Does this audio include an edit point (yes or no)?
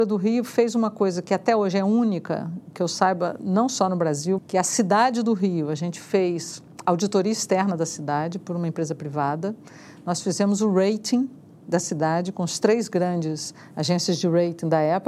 yes